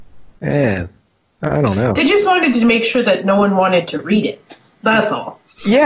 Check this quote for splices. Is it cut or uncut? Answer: uncut